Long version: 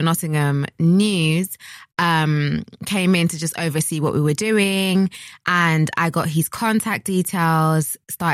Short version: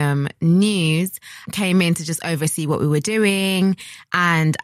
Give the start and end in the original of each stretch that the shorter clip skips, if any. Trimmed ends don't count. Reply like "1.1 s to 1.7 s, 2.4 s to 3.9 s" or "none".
1.8 s to 2.8 s